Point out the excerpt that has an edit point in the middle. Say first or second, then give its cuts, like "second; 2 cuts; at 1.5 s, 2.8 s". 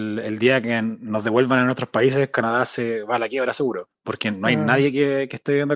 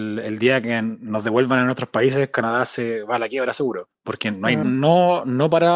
second; 1 cut; at 4.6 s